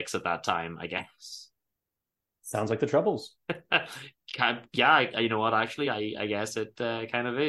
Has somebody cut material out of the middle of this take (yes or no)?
no